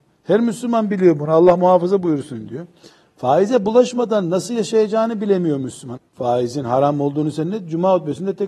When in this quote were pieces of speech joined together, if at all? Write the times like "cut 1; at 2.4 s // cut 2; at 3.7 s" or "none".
cut 1; at 3.0 s // cut 2; at 6.0 s